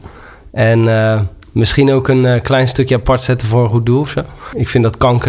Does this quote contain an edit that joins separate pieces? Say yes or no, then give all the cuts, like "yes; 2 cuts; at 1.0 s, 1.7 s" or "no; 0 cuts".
no; 0 cuts